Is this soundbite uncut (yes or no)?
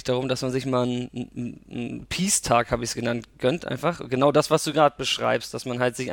yes